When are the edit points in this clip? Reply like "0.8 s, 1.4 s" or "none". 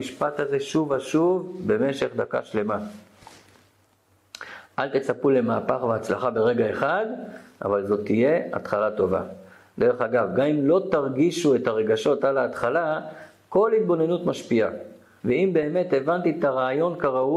15.2 s